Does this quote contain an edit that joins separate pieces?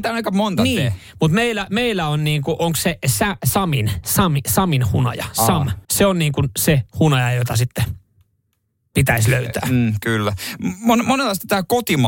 yes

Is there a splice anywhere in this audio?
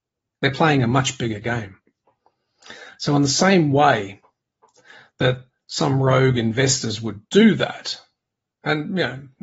no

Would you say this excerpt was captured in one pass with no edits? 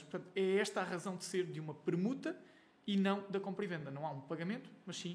yes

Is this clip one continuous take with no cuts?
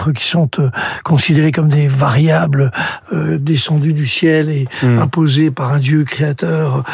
yes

